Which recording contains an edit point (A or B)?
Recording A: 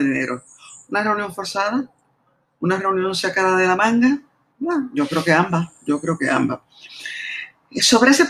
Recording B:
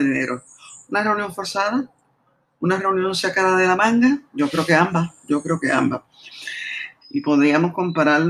B